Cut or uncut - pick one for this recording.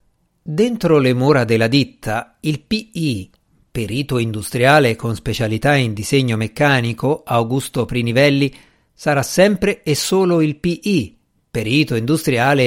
uncut